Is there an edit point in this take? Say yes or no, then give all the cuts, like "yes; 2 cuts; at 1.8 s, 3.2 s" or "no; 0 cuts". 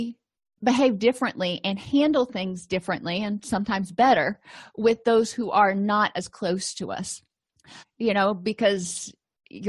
yes; 1 cut; at 7.8 s